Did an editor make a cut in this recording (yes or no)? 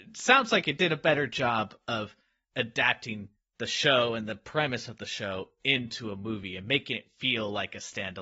no